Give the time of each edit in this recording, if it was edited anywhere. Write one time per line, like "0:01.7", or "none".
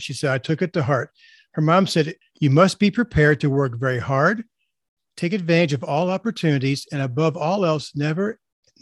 0:02.2